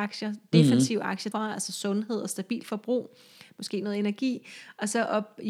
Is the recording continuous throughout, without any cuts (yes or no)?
no